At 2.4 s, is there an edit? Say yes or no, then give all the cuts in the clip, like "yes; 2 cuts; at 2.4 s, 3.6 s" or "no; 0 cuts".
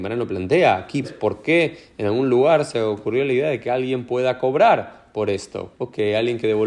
no; 2 cuts; at 1.0 s, 5.7 s